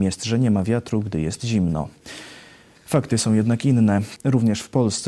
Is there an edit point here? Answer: yes; 1 cut; at 4.2 s

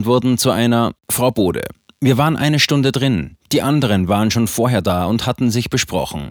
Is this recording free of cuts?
no; 1 cut; at 1.0 s

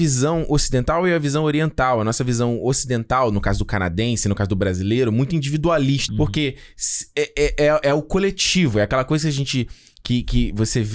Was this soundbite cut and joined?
yes; 1 cut; at 6.1 s

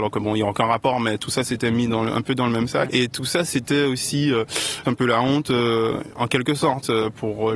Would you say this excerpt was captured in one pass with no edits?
no; 2 cuts; at 2.9 s, 4.8 s

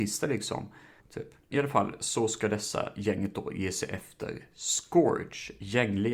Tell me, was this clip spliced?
yes; 1 cut; at 1.0 s

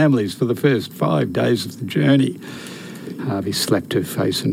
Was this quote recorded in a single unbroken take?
no; 1 cut; at 3.2 s

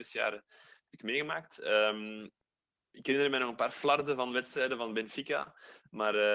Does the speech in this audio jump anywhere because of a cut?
no; 0 cuts

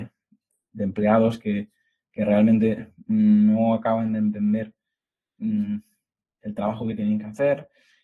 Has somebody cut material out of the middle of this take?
no; 0 cuts

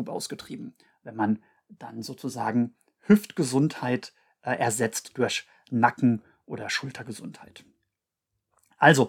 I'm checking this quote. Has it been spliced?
no; 0 cuts

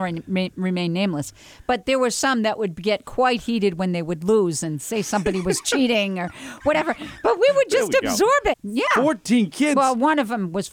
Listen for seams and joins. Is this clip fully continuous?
no; 1 cut; at 8.5 s

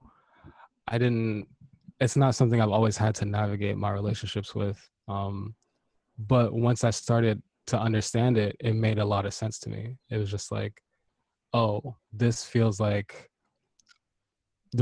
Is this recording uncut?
yes; 0 cuts

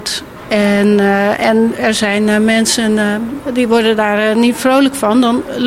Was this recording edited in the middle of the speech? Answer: no; 0 cuts

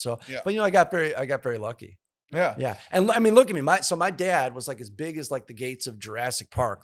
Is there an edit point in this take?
no; 0 cuts

